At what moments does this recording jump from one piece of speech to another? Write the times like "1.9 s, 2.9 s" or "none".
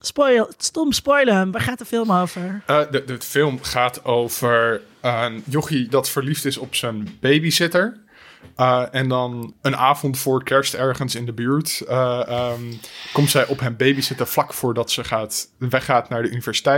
none